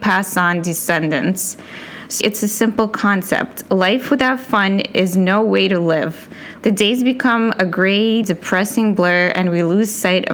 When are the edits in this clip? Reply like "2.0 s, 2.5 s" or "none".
2.2 s, 6.6 s, 8.2 s